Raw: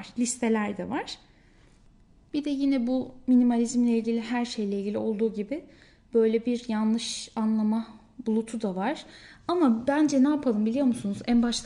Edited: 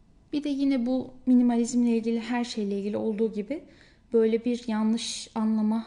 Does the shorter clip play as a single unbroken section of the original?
yes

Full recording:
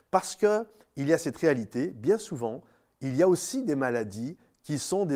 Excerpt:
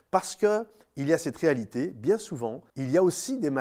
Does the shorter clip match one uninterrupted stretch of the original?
no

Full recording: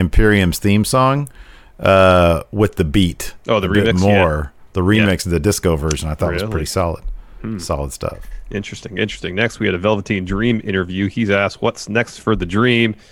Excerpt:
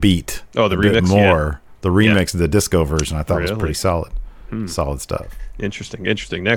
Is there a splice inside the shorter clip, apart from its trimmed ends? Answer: no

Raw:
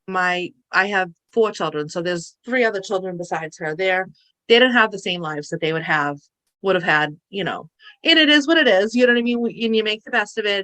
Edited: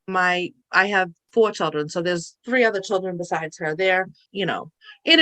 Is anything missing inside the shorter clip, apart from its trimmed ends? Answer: yes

